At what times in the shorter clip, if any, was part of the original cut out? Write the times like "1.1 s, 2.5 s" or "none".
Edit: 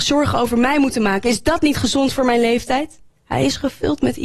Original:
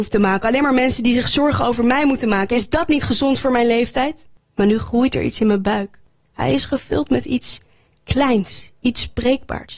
3.1 s

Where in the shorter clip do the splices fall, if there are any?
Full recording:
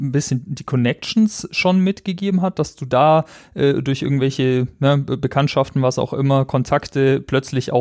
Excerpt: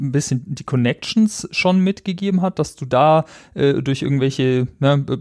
none

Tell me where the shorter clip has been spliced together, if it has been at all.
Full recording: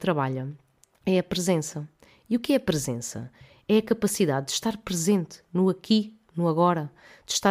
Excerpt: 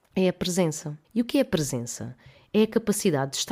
1.0 s

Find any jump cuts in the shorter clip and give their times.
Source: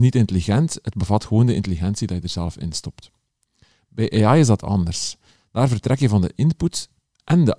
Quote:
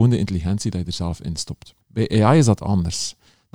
1.8 s

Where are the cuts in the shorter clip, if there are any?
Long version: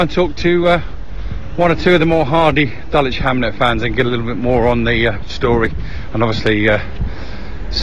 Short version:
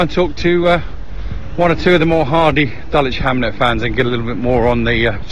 none

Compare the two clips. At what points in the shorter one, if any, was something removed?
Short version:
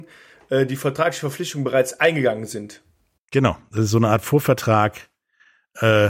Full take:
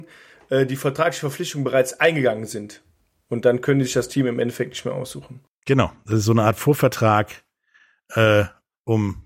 3.2 s

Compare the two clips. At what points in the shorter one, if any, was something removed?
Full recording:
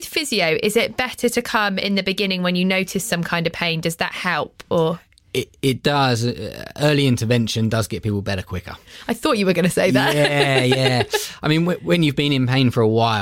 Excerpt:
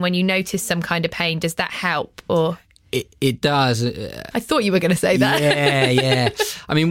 4.3 s

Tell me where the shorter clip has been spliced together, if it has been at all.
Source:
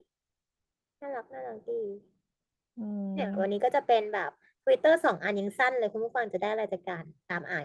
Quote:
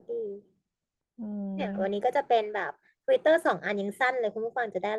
none

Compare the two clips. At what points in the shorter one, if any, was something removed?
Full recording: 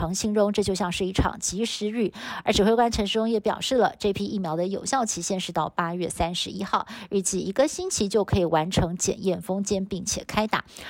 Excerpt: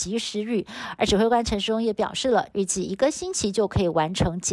2.5 s

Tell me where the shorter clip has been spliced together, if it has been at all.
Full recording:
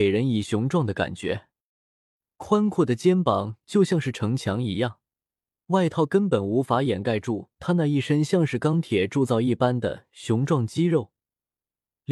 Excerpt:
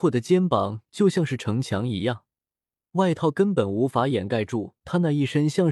none

